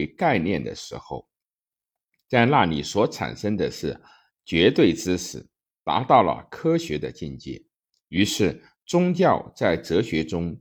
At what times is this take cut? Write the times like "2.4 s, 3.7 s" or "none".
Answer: none

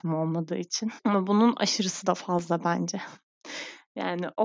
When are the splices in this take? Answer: 1.0 s

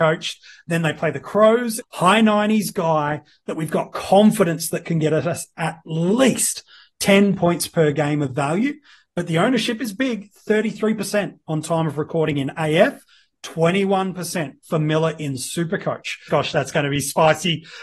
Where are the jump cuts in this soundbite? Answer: 1.8 s, 16.3 s

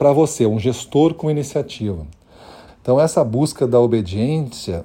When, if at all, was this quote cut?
2.7 s

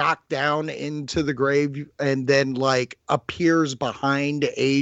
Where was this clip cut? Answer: none

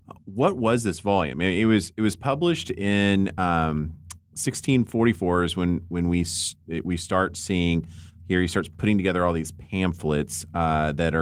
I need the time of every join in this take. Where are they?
none

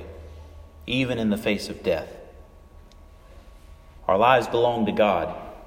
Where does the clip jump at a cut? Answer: 4.0 s

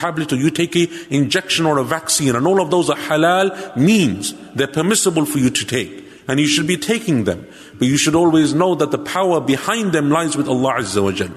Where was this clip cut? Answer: 6.2 s, 7.7 s

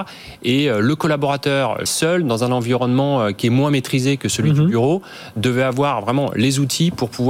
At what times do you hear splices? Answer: 1.9 s

